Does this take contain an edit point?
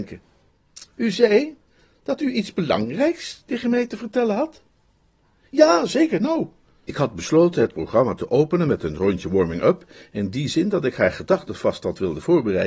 no; 0 cuts

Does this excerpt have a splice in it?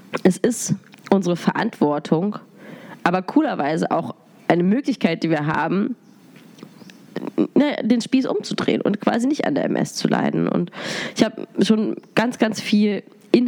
no; 0 cuts

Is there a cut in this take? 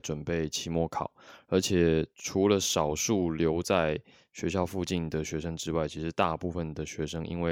no; 0 cuts

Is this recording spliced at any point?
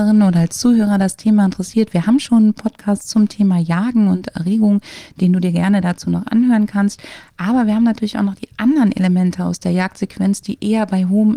no; 0 cuts

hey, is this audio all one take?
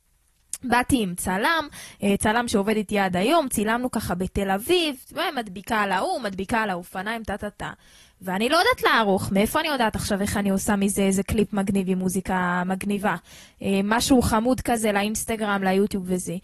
yes; 0 cuts

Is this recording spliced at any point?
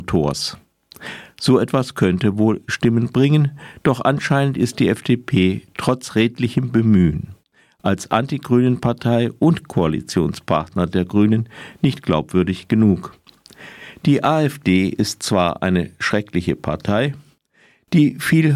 no; 0 cuts

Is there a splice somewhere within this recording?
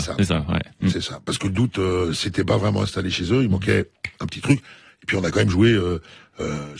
no; 0 cuts

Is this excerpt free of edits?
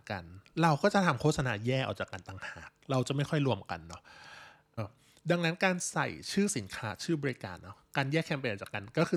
no; 1 cut; at 4.8 s

